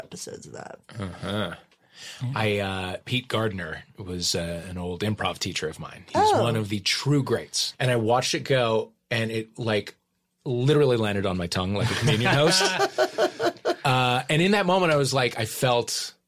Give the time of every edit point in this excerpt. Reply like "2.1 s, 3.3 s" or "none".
7.7 s